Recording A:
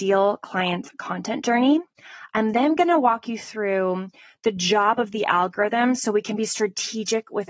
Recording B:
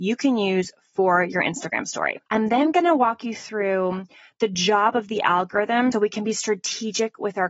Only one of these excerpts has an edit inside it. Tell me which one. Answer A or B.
B